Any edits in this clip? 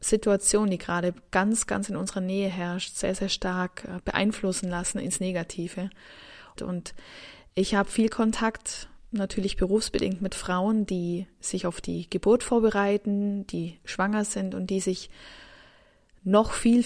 yes; 1 cut; at 6.6 s

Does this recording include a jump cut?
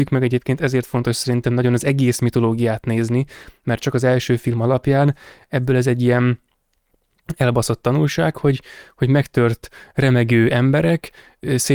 no; 0 cuts

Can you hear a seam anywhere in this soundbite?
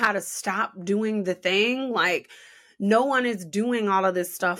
no; 0 cuts

